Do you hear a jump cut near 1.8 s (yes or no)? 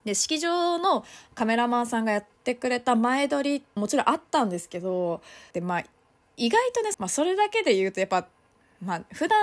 no